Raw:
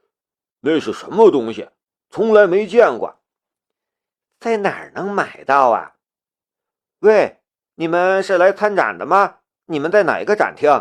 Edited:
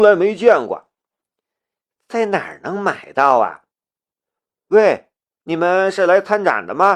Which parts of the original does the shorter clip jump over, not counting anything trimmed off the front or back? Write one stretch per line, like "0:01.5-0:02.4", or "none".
none